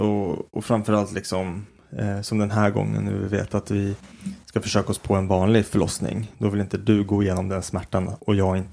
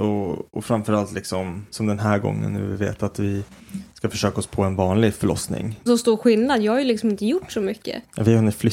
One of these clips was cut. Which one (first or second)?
second